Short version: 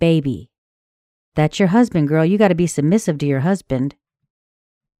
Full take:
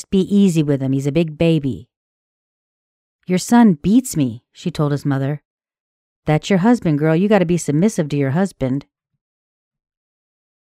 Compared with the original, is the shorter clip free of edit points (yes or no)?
no